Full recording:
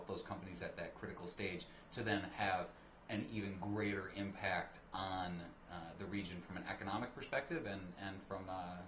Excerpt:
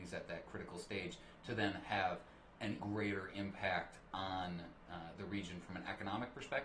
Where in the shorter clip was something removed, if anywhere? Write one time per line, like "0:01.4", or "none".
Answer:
0:02.8